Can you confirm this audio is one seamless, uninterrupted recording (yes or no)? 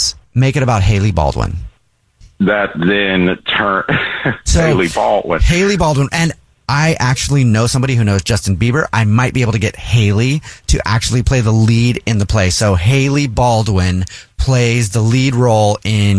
yes